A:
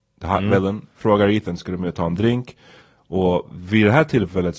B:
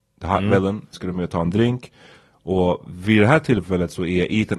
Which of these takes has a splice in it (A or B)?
B